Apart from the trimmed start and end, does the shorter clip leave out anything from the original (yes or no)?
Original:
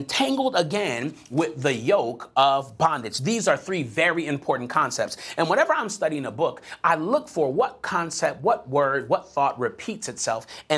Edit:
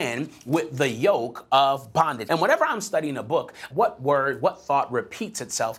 yes